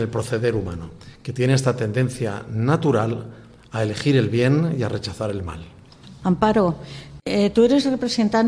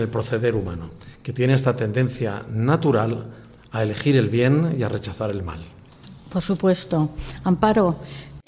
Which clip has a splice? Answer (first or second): first